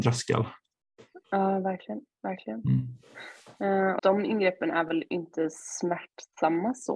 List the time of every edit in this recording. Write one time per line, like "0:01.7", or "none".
0:04.0